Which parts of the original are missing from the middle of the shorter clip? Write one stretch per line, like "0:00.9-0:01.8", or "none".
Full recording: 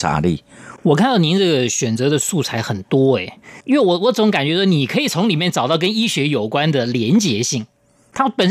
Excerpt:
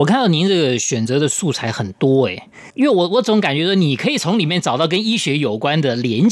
none